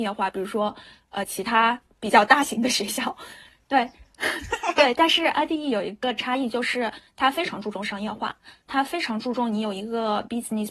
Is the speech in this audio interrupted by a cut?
no; 0 cuts

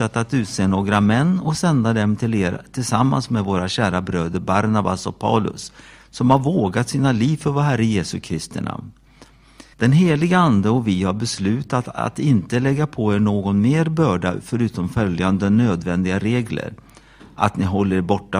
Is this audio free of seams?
no; 1 cut; at 9.7 s

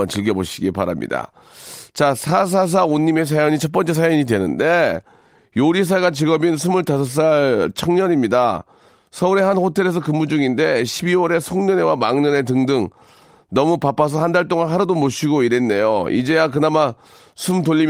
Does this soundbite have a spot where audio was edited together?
no; 0 cuts

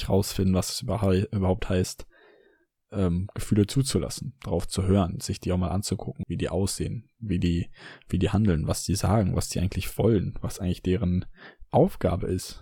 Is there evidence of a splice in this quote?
yes; 1 cut; at 6.2 s

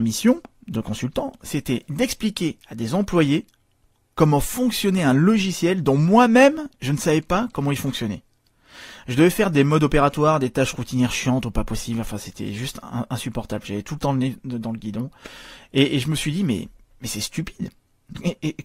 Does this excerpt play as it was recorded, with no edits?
yes; 0 cuts

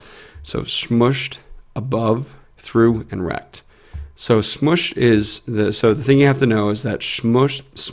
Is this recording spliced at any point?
yes; 1 cut; at 2.4 s

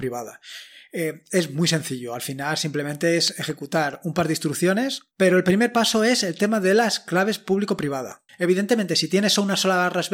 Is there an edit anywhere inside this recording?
yes; 2 cuts; at 5.1 s, 8.3 s

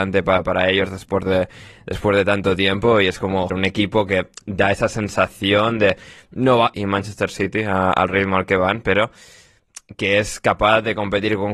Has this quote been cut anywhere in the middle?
yes; 2 cuts; at 3.5 s, 6.7 s

